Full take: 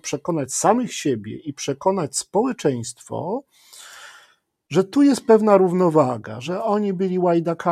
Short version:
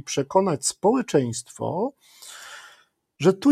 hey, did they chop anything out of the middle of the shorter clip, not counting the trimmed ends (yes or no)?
no